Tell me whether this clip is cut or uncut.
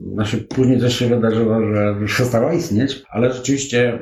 cut